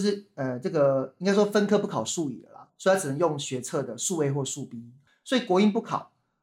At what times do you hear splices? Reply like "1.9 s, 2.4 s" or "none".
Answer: none